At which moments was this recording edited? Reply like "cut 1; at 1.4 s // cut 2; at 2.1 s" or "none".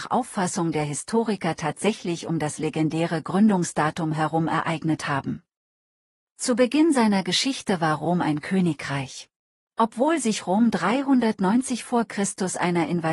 cut 1; at 9.6 s